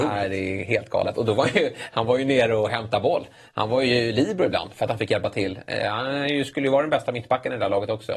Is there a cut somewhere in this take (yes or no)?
no